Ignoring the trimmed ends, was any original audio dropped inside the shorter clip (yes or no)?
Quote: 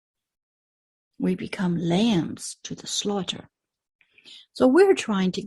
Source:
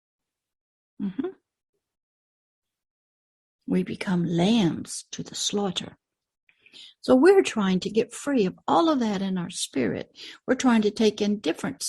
no